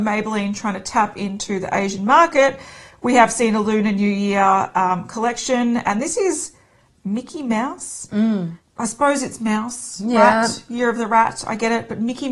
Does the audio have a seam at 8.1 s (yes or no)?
no